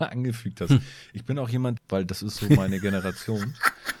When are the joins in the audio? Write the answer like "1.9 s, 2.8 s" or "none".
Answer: 1.8 s